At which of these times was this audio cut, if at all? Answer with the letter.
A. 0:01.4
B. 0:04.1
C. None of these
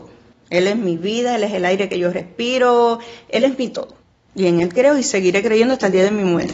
C